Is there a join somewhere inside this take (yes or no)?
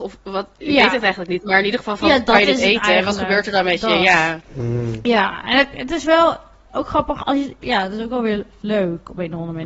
yes